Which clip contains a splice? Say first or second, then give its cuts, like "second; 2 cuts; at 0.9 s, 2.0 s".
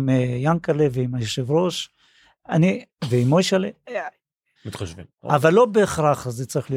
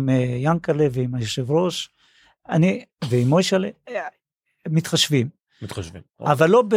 first; 1 cut; at 4.6 s